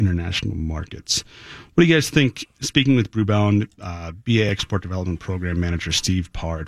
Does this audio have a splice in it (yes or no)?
yes